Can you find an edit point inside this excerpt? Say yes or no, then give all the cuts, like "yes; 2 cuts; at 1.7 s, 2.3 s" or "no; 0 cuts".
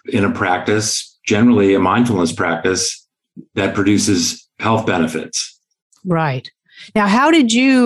no; 0 cuts